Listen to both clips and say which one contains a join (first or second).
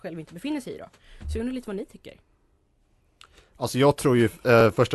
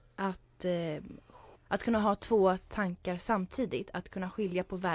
second